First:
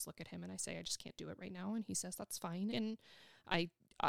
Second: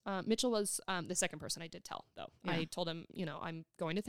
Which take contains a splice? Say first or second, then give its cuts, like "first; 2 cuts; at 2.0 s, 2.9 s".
first; 1 cut; at 2.7 s